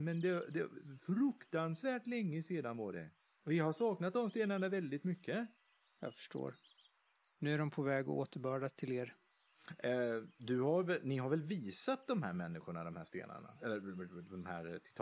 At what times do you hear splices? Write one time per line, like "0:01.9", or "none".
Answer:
none